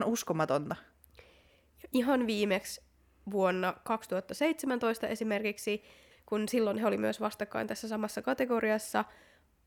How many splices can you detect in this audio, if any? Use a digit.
1